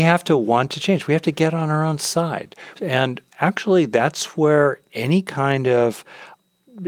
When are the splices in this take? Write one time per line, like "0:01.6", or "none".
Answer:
0:02.7